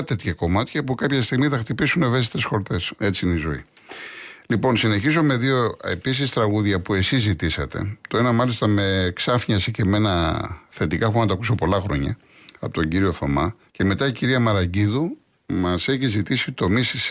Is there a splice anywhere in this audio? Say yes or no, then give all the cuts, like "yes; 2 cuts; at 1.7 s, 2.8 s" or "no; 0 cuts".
yes; 2 cuts; at 3.0 s, 13.7 s